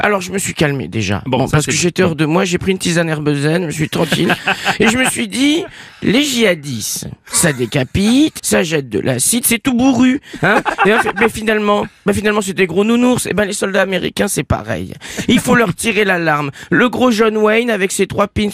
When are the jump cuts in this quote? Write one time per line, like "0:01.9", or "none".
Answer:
0:08.4